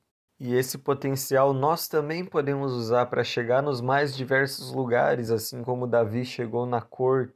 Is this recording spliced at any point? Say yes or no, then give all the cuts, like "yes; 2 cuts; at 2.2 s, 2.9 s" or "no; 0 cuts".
no; 0 cuts